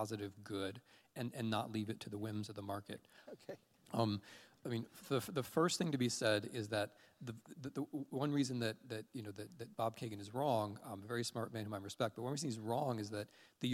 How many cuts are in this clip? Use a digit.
1